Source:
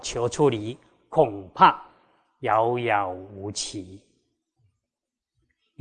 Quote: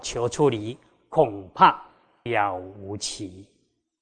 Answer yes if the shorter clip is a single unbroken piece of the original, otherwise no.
no